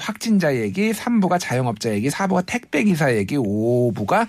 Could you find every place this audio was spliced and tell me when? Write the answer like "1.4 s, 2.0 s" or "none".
none